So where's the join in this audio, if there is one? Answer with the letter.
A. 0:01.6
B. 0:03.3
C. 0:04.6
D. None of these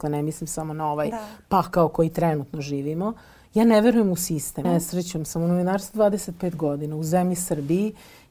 C